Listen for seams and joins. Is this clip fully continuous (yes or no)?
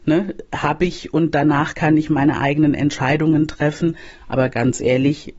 yes